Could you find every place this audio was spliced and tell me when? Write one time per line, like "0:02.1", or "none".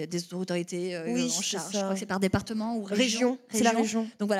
none